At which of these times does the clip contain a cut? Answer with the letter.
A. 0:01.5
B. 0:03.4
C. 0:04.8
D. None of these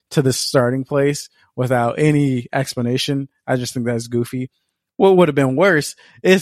D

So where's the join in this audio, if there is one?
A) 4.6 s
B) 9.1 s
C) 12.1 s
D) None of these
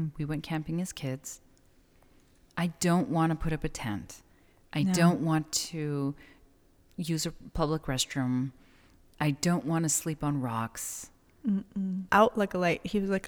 C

